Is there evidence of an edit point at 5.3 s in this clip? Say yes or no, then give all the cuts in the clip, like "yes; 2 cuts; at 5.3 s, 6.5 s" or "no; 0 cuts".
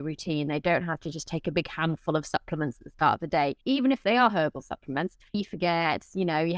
yes; 2 cuts; at 3.6 s, 5.3 s